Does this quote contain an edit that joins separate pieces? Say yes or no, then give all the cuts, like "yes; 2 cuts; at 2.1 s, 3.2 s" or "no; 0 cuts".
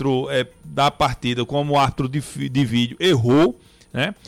no; 0 cuts